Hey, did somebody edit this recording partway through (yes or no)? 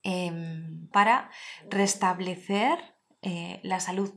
yes